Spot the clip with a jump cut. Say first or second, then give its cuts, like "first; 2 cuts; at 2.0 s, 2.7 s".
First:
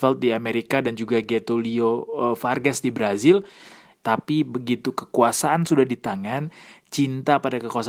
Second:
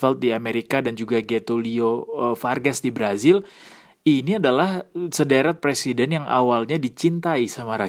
first; 1 cut; at 4.0 s